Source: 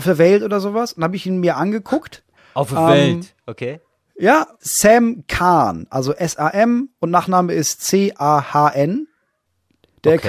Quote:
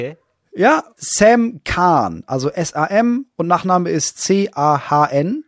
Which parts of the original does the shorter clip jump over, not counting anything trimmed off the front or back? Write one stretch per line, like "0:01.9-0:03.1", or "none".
none